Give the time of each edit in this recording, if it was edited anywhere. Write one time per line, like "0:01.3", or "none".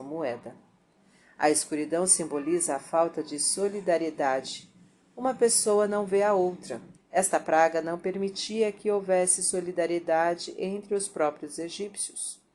0:06.9